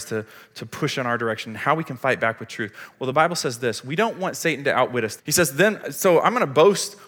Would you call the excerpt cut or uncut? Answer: cut